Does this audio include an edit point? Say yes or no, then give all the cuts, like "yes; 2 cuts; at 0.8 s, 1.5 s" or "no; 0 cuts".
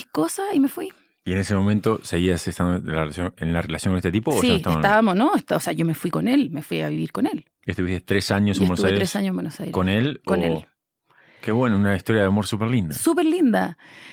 no; 0 cuts